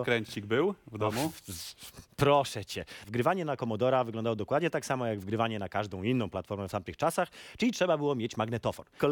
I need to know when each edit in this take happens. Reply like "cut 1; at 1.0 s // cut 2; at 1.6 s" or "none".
none

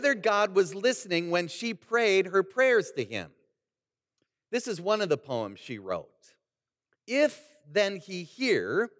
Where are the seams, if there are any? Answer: cut 1; at 7.0 s

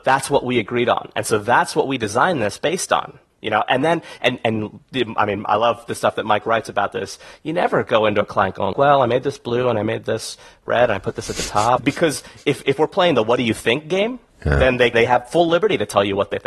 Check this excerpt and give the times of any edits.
cut 1; at 8.7 s // cut 2; at 11.8 s // cut 3; at 14.9 s

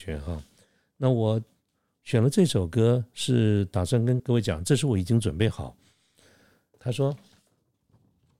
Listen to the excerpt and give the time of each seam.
cut 1; at 4.2 s // cut 2; at 6.7 s

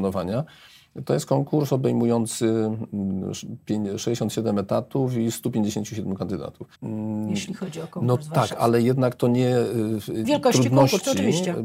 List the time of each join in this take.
cut 1; at 6.7 s // cut 2; at 10.2 s

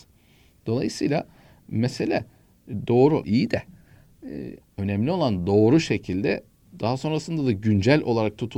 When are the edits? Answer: cut 1; at 3.2 s // cut 2; at 4.6 s

